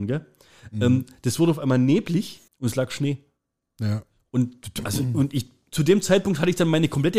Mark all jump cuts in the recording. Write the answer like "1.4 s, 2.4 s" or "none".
2.5 s